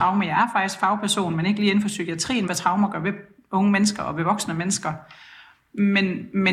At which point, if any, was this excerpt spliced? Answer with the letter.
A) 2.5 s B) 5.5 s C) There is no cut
A